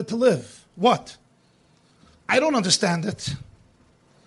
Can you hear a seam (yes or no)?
no